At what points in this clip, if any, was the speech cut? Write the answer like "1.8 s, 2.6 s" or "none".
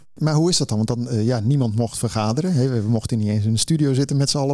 none